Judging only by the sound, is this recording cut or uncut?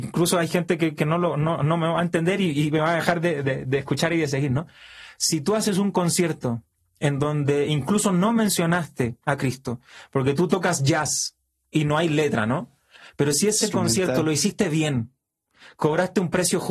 uncut